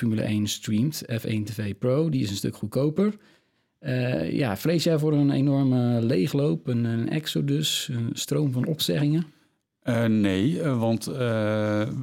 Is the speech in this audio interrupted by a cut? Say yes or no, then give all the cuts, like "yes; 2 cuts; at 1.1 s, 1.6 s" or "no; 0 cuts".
no; 0 cuts